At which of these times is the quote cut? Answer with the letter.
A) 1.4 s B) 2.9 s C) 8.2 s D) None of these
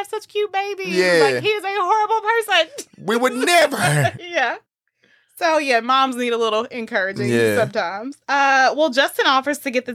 C